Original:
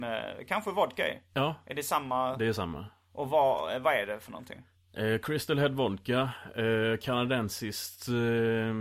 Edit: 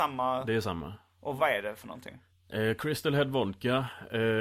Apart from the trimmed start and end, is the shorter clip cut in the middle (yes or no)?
yes